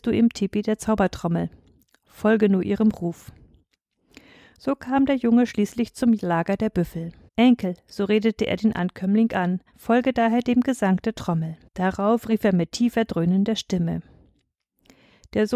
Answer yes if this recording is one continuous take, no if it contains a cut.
no